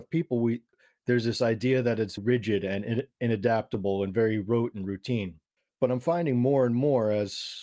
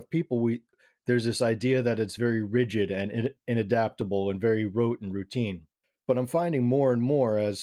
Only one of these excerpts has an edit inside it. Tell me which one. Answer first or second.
first